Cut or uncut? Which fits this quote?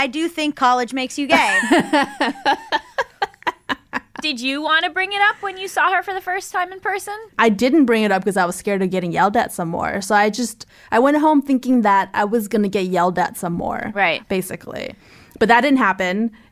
cut